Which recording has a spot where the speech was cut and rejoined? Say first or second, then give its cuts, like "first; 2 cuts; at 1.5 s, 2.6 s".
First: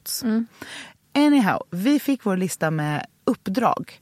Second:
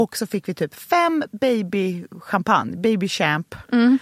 first; 1 cut; at 1.0 s